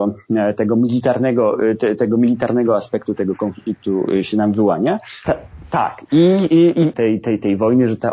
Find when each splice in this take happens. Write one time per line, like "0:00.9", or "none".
0:05.2
0:06.9